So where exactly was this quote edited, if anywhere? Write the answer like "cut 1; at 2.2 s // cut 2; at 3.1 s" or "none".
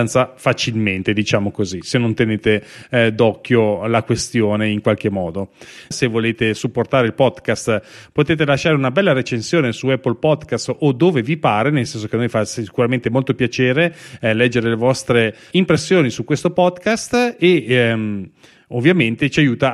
cut 1; at 5.9 s // cut 2; at 15.5 s